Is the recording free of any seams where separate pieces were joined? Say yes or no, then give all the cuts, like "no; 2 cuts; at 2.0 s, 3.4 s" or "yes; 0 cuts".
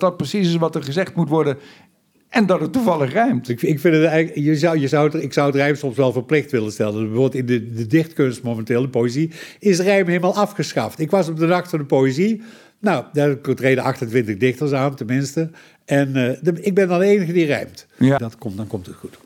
no; 1 cut; at 18.2 s